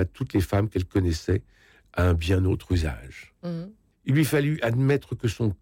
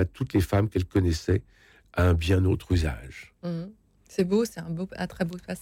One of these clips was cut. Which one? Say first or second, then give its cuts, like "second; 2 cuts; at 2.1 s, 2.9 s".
first; 1 cut; at 3.9 s